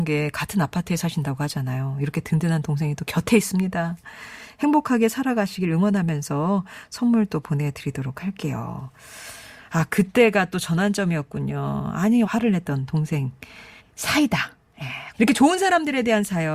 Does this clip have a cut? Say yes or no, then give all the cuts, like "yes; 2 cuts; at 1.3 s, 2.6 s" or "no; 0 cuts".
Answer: yes; 3 cuts; at 12.2 s, 13.8 s, 15.1 s